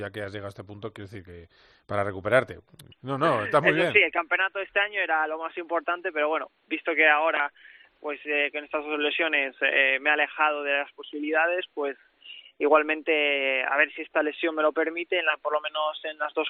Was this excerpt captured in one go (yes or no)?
no